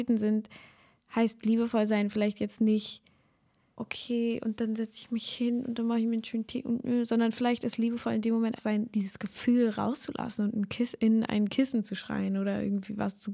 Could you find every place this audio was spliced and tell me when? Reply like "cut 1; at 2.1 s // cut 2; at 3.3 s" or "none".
cut 1; at 3.8 s // cut 2; at 8.6 s